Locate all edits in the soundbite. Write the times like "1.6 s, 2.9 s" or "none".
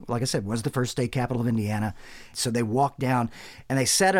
2.3 s